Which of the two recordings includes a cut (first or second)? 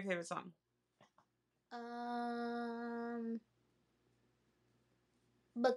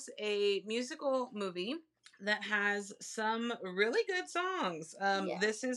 second